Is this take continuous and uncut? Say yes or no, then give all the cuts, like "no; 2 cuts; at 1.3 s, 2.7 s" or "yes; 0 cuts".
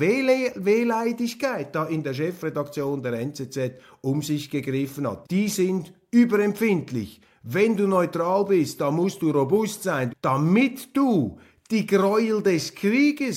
no; 2 cuts; at 5.2 s, 10.1 s